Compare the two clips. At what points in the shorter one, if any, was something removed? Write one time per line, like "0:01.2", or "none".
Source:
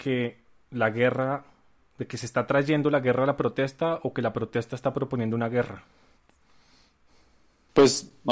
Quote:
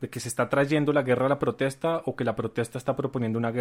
none